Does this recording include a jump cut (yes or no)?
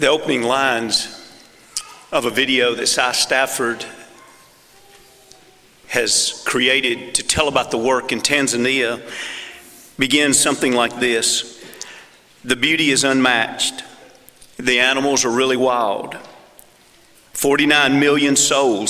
no